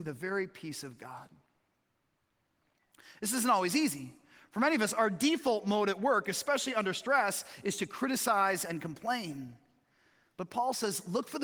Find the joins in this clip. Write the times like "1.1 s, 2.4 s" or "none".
none